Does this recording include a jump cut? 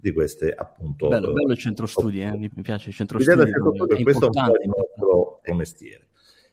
yes; 3 cuts; at 2.5 s, 3.9 s, 5.5 s

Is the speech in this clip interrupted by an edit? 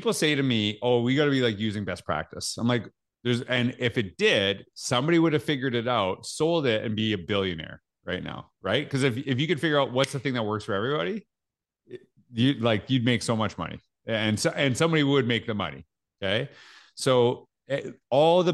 yes; 1 cut; at 3.0 s

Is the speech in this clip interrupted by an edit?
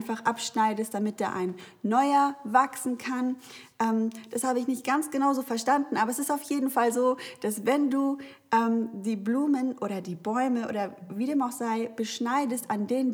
no; 0 cuts

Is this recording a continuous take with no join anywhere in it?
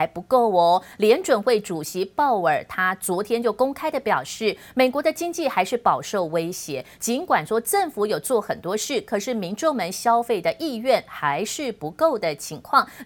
yes; 0 cuts

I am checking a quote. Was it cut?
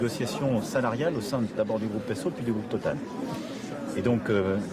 no; 0 cuts

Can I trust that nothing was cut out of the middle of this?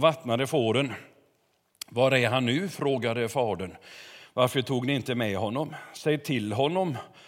yes; 0 cuts

